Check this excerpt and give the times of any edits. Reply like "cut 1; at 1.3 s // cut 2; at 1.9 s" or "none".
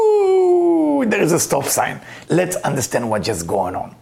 cut 1; at 2.2 s